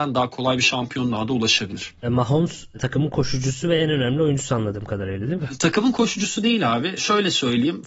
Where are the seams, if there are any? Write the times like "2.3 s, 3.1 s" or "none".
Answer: none